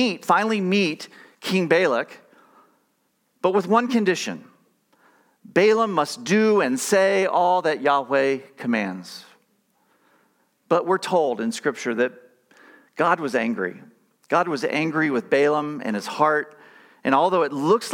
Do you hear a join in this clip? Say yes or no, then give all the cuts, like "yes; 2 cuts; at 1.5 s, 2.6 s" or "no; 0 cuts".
no; 0 cuts